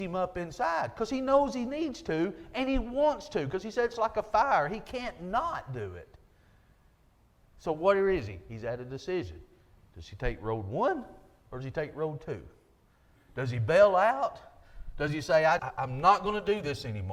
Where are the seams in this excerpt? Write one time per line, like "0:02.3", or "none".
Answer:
0:07.4
0:15.6